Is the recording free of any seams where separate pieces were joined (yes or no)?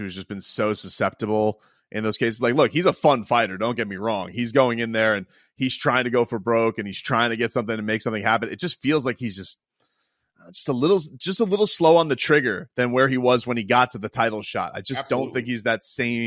yes